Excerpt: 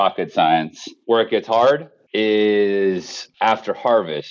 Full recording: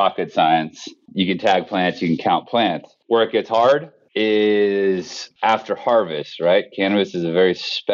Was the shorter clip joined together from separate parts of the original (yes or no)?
yes